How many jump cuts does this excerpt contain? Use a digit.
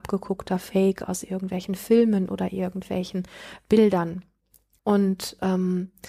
1